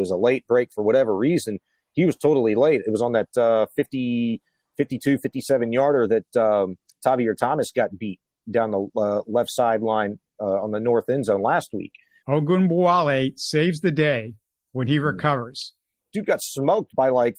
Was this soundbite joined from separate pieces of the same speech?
yes; 2 cuts; at 12.2 s, 16.1 s

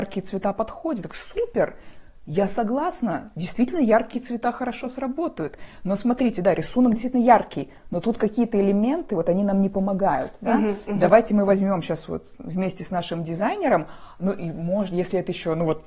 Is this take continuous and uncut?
yes; 0 cuts

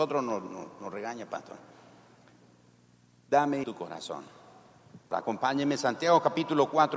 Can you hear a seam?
yes; 2 cuts; at 3.6 s, 5.1 s

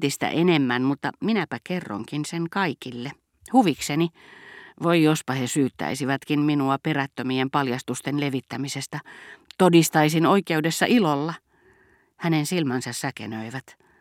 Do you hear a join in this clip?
no; 0 cuts

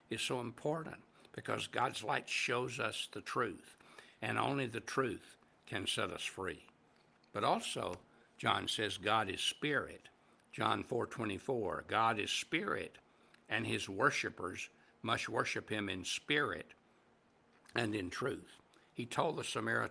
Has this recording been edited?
no; 0 cuts

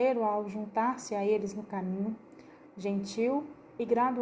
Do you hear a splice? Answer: yes; 1 cut; at 2.7 s

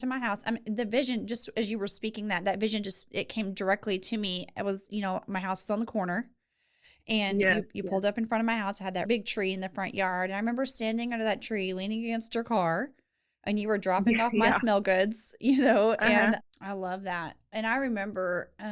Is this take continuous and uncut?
no; 2 cuts; at 9.0 s, 16.4 s

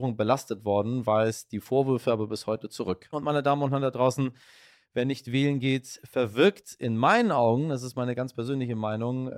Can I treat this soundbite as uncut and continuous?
no; 1 cut; at 3.1 s

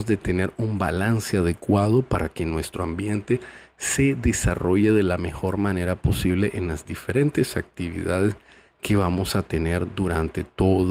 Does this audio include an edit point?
no; 0 cuts

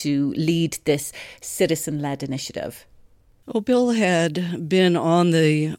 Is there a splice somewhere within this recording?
no; 0 cuts

